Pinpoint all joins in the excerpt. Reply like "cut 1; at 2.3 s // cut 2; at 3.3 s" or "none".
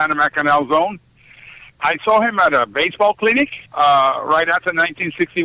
cut 1; at 1.7 s // cut 2; at 3.7 s

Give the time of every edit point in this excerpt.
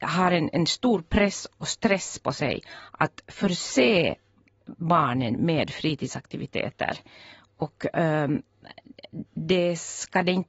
cut 1; at 9.3 s

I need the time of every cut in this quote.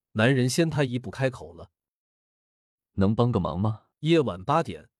cut 1; at 3.9 s

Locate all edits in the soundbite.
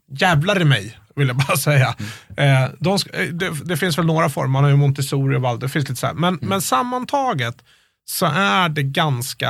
none

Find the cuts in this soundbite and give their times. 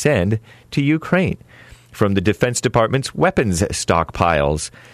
none

